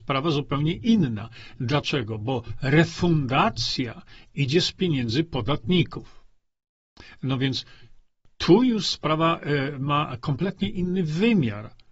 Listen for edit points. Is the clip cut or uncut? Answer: uncut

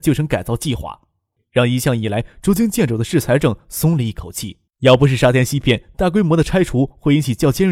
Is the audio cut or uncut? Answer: cut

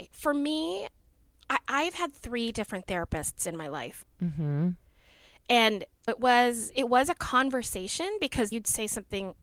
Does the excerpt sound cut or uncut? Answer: cut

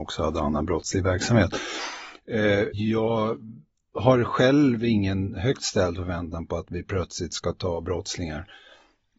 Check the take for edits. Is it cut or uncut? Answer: cut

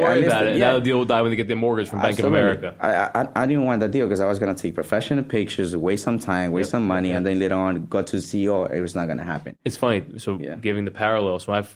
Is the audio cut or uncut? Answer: uncut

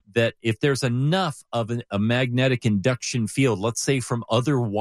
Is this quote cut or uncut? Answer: uncut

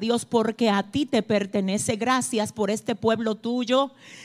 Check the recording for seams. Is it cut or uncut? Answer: uncut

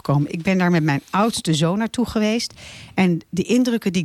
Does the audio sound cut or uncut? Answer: uncut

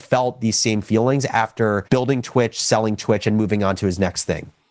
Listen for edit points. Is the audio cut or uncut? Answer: cut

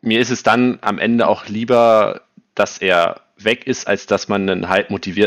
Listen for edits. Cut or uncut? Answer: uncut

